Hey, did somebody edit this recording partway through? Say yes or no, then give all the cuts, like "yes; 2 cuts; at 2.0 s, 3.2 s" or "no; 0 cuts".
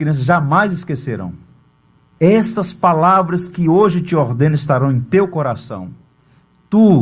yes; 1 cut; at 2.2 s